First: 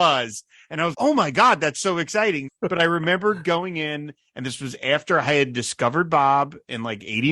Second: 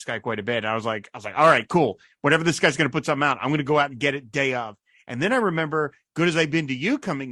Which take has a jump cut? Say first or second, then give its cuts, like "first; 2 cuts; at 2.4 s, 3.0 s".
first; 2 cuts; at 0.9 s, 2.5 s